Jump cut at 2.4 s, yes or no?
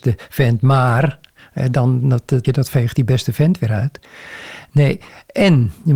yes